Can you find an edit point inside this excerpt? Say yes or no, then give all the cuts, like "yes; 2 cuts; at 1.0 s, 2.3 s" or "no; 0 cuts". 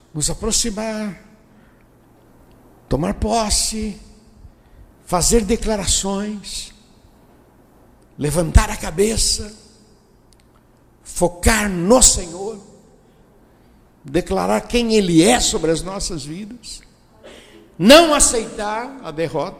no; 0 cuts